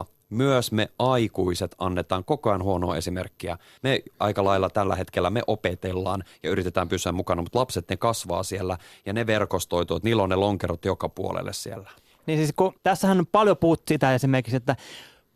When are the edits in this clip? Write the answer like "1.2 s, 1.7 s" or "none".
3.8 s, 12.8 s, 13.9 s